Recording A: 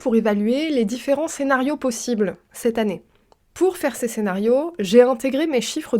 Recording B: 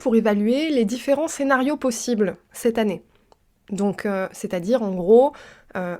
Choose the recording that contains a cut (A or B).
A